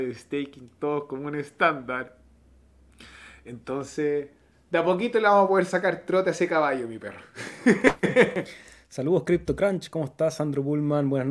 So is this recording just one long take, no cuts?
yes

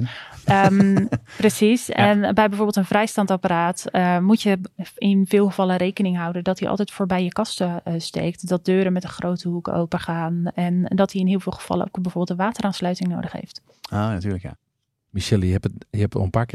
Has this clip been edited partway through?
no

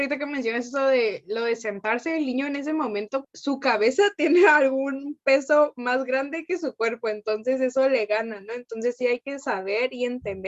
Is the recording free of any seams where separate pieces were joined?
no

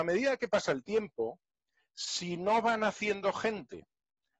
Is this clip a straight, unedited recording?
yes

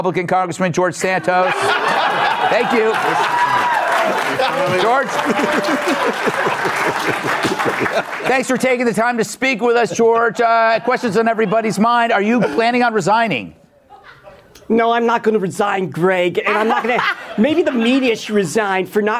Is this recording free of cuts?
yes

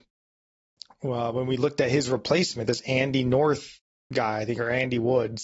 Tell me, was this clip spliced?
no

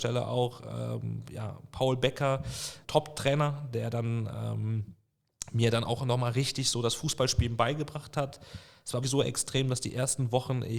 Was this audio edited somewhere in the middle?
yes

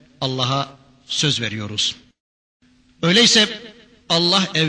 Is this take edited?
no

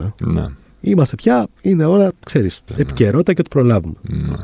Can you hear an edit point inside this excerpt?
yes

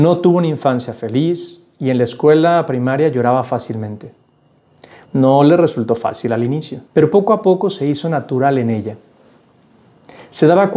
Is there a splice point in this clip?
yes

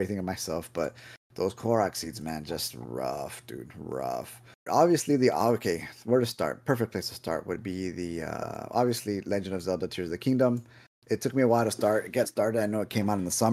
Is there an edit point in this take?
yes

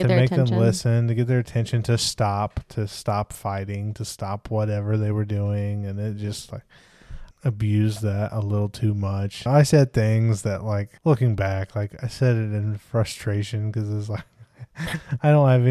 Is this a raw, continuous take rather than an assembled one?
no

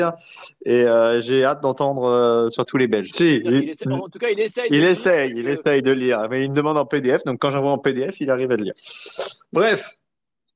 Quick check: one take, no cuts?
no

